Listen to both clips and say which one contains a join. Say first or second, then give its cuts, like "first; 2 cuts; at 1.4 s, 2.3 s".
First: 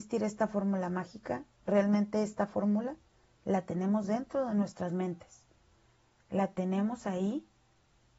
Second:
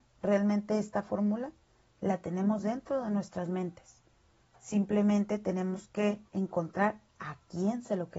second; 2 cuts; at 4.4 s, 6.3 s